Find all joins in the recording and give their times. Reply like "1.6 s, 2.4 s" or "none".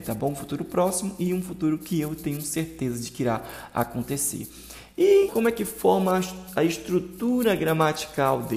5.3 s

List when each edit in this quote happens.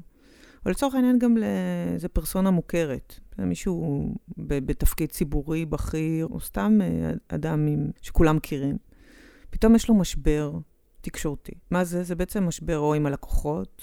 6.3 s, 8.0 s, 11.6 s

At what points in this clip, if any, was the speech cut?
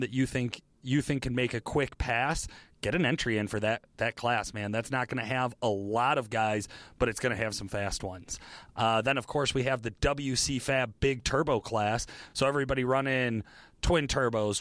none

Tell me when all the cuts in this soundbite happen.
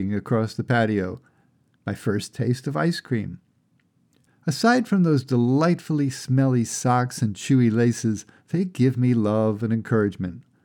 4.3 s

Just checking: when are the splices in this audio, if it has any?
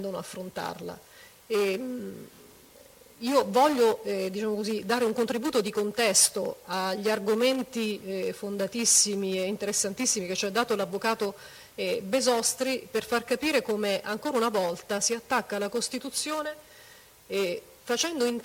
none

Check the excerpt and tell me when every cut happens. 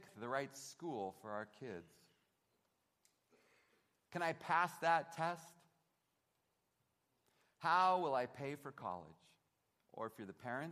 none

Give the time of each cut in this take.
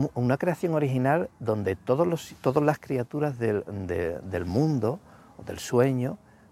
none

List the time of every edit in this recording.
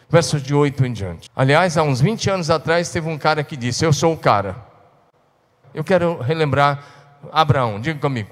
1.3 s, 5.6 s

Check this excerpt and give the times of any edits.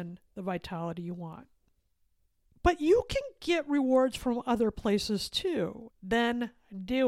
2.5 s, 5.9 s

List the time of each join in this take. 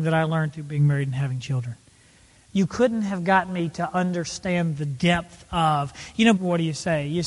6.4 s

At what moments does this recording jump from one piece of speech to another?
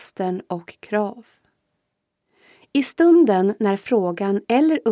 none

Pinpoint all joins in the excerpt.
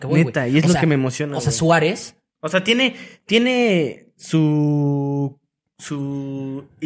none

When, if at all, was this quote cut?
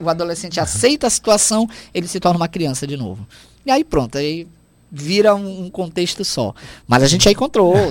none

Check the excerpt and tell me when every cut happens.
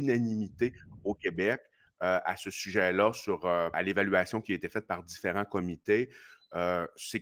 3.7 s

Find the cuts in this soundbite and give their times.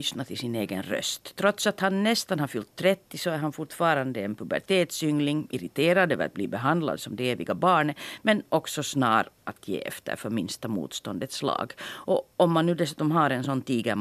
none

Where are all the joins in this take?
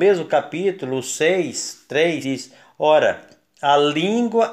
2.2 s

